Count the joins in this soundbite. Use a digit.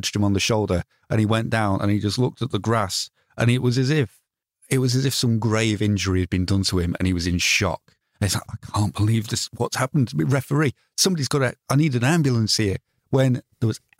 0